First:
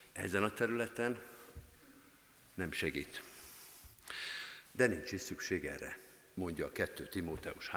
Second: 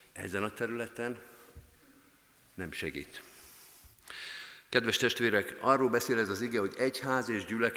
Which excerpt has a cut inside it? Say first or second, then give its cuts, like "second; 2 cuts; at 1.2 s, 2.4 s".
first; 1 cut; at 4.6 s